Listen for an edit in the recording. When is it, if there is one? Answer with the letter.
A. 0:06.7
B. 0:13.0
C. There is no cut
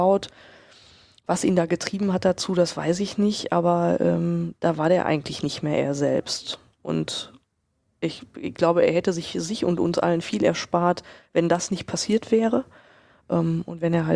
C